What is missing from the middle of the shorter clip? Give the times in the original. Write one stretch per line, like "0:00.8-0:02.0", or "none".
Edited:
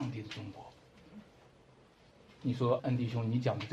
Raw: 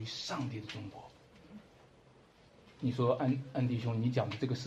0:03.2-0:03.5

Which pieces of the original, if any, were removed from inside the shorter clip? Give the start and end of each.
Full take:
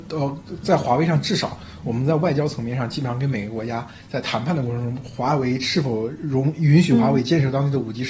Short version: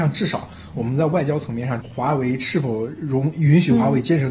0:02.9-0:05.0

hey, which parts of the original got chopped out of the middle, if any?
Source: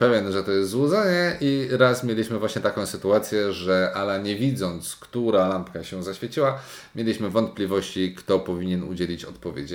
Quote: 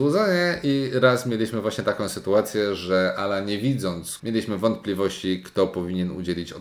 0:05.0-0:06.9

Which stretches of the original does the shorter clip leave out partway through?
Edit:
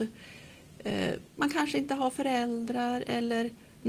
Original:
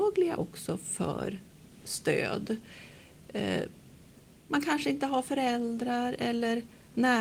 0:03.8-0:04.4

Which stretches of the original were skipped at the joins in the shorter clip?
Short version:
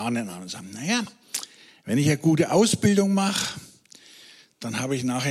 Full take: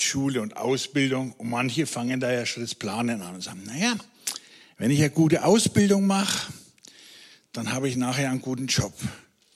none

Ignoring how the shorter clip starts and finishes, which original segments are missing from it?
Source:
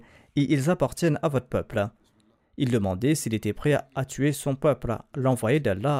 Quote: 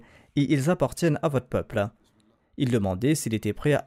none

